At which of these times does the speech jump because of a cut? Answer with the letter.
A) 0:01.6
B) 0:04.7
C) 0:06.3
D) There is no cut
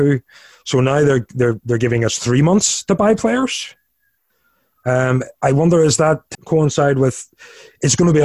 C